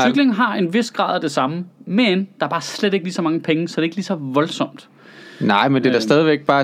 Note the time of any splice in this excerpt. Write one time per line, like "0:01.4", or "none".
none